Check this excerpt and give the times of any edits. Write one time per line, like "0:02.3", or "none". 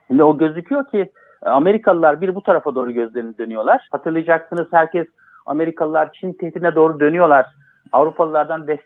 0:03.9